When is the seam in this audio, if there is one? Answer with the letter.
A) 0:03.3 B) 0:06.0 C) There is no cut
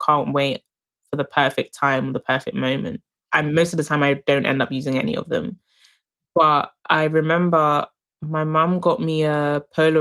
A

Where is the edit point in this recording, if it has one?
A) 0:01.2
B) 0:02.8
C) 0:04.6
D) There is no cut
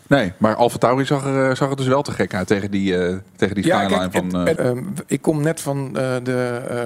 C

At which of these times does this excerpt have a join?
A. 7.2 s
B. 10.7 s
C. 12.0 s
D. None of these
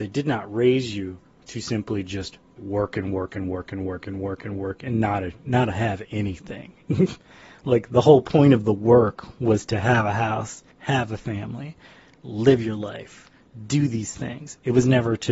B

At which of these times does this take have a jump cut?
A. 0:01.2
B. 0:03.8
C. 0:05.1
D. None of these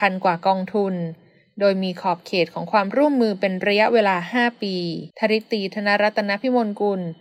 C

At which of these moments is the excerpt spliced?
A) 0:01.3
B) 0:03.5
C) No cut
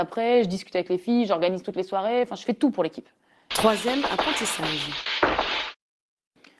B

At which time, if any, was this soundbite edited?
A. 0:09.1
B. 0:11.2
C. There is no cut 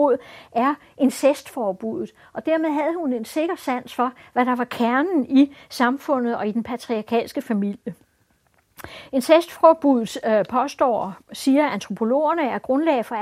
C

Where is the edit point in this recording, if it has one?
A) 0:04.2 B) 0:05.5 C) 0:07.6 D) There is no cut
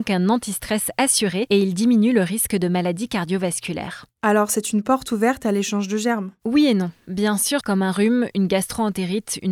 C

